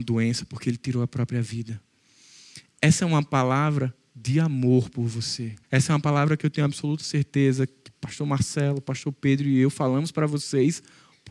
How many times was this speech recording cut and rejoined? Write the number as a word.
one